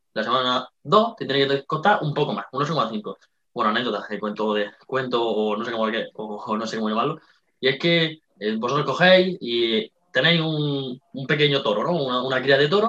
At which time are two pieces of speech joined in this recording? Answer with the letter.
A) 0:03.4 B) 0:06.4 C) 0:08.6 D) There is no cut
A